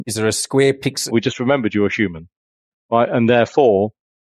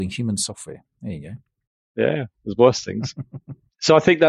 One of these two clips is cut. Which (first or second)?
first